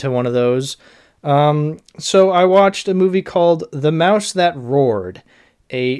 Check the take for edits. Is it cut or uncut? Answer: uncut